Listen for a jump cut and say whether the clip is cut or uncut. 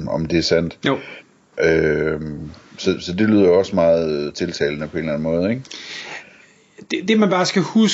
uncut